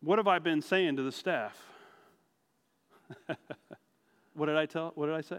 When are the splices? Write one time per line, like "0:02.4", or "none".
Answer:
0:04.3